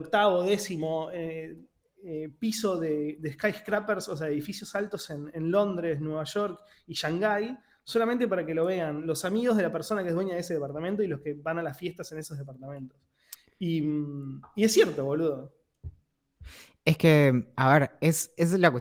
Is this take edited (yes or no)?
no